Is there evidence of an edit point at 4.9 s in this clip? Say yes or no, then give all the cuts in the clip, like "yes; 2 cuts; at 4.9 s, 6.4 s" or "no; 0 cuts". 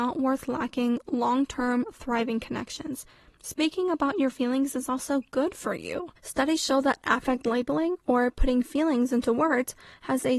no; 1 cut; at 6.2 s